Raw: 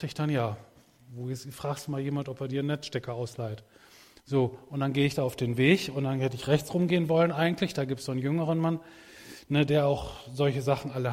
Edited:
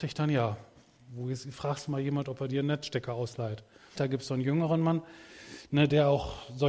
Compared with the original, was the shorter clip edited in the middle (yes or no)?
yes